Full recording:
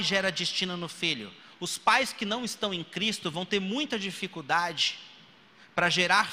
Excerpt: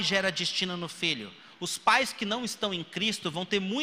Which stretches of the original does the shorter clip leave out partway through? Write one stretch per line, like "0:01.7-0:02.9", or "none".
none